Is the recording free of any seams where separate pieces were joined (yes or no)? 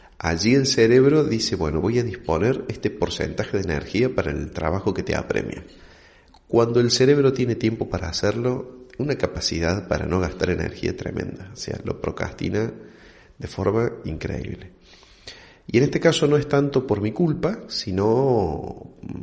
yes